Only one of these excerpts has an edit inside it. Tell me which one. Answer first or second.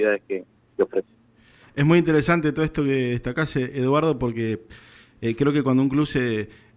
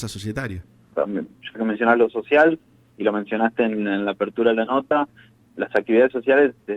second